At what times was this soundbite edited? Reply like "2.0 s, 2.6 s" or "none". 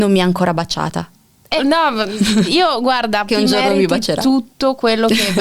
1.6 s, 3.3 s